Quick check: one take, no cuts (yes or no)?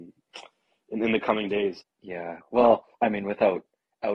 no